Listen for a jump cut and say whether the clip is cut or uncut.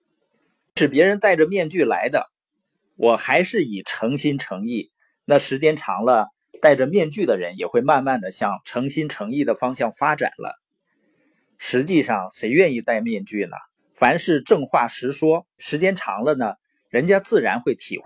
cut